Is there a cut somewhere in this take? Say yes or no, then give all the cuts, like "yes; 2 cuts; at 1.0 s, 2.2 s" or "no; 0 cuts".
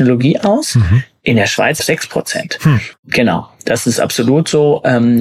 yes; 2 cuts; at 1.8 s, 2.9 s